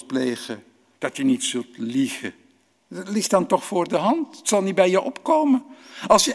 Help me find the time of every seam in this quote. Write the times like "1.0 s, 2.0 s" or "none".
0.9 s, 2.7 s